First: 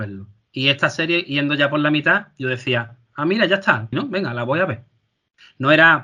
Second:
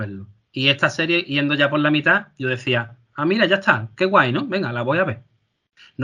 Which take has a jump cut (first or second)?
first